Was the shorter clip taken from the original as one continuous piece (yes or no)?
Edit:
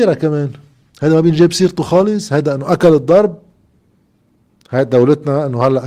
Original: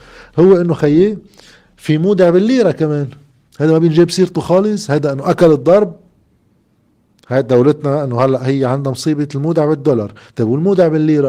yes